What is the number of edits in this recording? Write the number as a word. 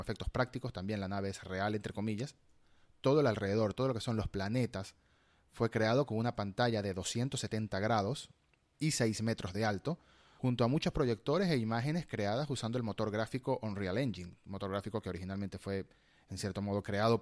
zero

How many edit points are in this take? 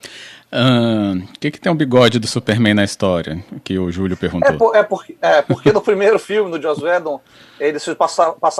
zero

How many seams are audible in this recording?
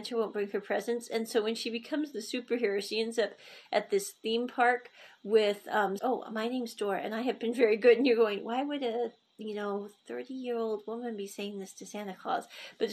one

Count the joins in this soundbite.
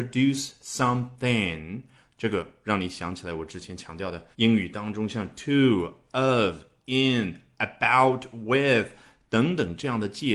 one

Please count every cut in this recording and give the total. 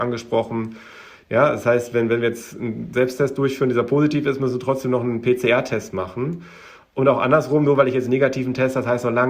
one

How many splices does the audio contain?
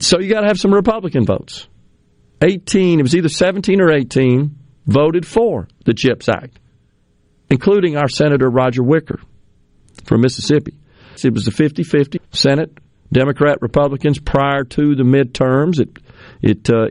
two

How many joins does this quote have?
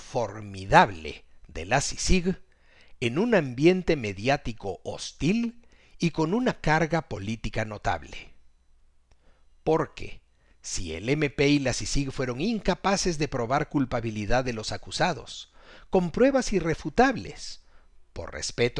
zero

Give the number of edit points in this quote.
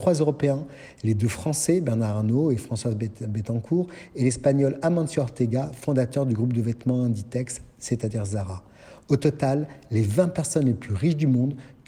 zero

